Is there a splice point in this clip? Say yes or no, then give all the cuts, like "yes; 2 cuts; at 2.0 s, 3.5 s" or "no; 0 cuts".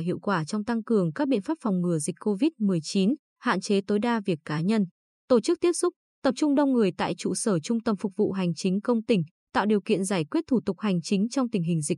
no; 0 cuts